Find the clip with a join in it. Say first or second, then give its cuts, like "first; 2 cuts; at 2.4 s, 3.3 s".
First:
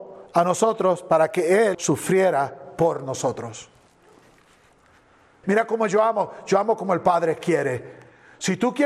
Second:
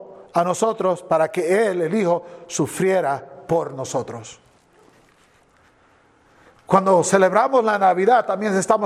first; 2 cuts; at 1.7 s, 5.4 s